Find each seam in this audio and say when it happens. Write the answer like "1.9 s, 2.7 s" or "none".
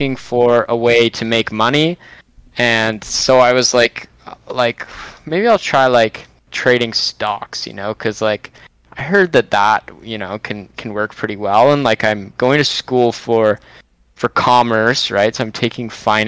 none